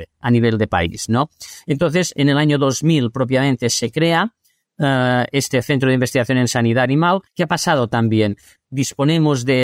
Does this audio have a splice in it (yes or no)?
yes